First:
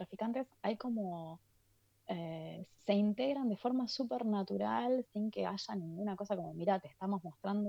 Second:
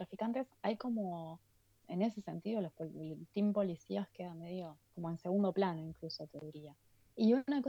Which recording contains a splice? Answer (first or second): second